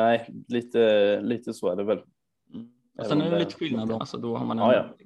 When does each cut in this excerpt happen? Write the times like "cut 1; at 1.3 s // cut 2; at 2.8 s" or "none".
cut 1; at 4.0 s